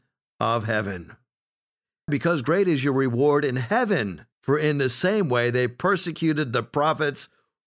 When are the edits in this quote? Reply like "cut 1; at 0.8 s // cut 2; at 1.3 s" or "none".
cut 1; at 2.1 s // cut 2; at 4.3 s